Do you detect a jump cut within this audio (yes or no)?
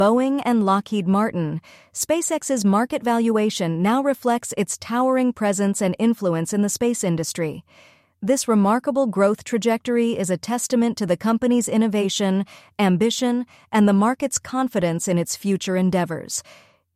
no